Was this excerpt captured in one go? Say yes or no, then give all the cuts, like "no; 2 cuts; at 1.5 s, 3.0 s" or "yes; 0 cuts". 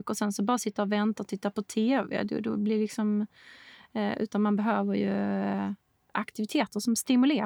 yes; 0 cuts